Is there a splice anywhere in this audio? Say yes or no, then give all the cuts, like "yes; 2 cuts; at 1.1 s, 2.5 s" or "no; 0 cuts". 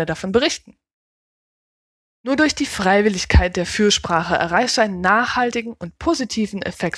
no; 0 cuts